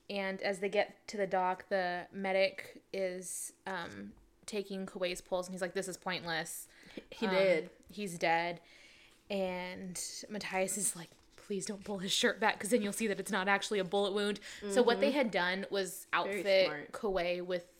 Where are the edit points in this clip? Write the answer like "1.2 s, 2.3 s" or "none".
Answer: none